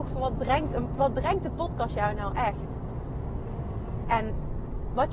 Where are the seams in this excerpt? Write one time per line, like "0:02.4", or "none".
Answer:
0:04.0